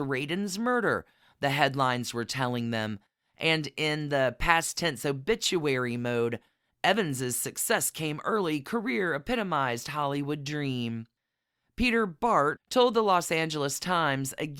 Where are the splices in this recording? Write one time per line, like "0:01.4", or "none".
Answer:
0:12.6